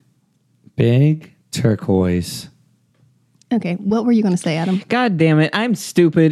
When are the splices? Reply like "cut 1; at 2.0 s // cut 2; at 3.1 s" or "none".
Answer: none